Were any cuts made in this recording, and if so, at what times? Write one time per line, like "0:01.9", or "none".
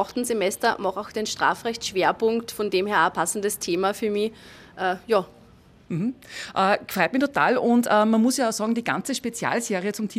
none